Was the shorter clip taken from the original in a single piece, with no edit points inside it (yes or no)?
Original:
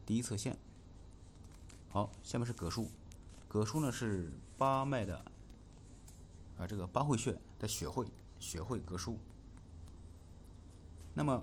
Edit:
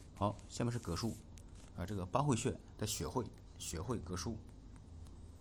no